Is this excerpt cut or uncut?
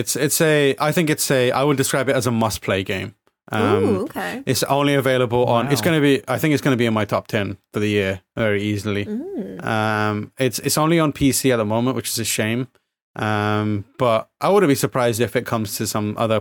uncut